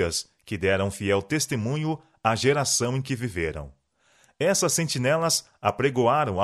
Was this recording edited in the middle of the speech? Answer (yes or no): no